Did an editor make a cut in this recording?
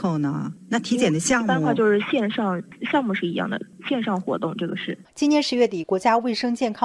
no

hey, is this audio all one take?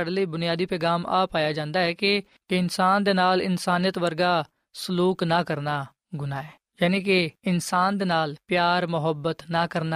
yes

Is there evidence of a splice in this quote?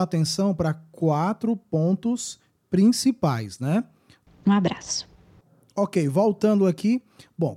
yes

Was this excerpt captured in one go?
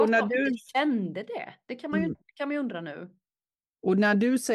yes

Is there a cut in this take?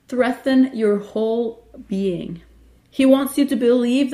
yes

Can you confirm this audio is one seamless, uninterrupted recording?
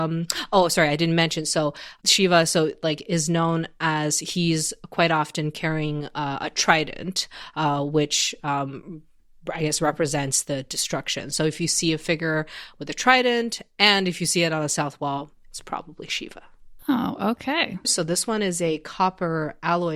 no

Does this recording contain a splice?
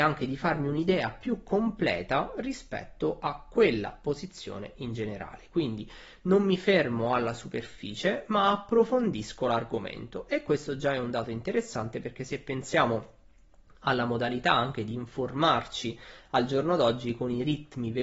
no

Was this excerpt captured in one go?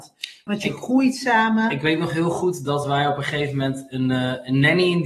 yes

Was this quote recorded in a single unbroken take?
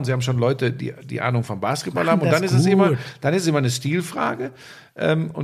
yes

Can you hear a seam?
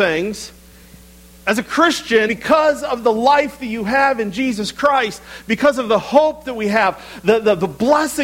yes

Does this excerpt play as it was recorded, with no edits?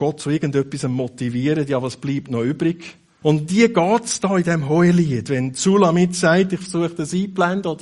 no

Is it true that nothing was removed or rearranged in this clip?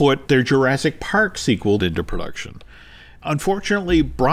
no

